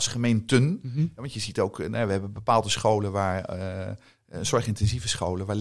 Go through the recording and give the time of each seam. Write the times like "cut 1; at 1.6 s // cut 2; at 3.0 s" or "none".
none